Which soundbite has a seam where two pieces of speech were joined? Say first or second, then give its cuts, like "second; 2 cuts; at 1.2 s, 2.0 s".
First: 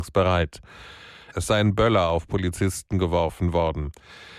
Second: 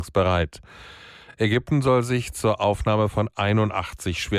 first; 1 cut; at 1.3 s